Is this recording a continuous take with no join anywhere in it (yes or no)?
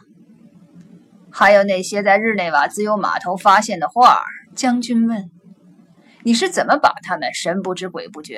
no